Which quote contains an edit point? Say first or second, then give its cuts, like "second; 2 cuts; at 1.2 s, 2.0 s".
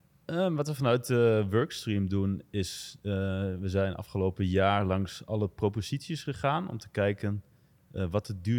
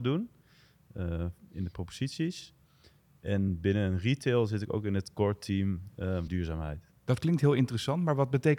second; 1 cut; at 6.3 s